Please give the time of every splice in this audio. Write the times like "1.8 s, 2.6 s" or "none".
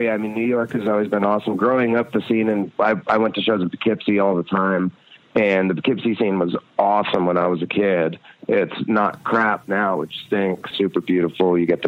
10.7 s